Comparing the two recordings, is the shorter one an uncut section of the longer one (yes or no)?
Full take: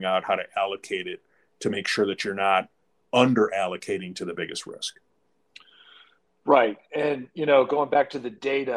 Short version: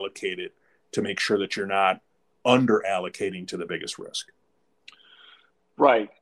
yes